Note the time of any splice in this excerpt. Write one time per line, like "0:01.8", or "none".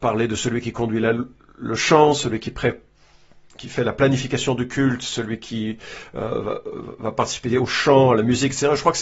none